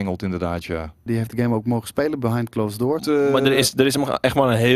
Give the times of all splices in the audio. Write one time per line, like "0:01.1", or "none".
0:01.1
0:03.0